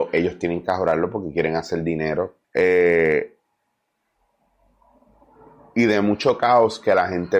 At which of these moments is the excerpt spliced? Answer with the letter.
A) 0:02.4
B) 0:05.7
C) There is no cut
A